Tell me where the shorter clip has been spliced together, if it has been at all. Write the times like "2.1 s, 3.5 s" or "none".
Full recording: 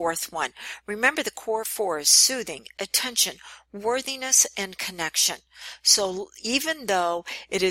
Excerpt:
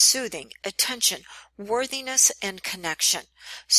none